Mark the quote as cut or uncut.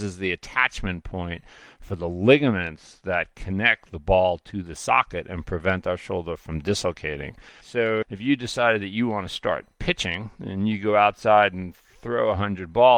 cut